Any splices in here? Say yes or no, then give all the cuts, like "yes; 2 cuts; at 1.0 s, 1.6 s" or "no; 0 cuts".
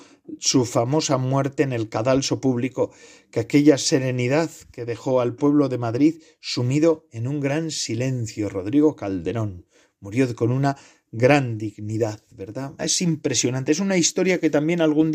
yes; 1 cut; at 12.8 s